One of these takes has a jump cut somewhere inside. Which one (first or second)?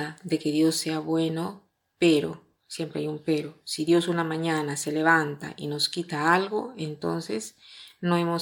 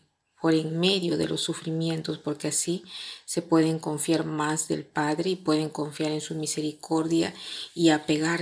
first